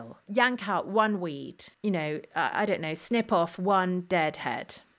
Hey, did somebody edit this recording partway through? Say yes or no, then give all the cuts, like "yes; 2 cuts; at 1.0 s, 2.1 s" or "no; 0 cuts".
no; 0 cuts